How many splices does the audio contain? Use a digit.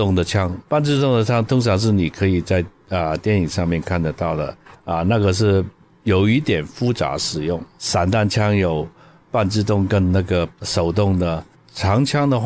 1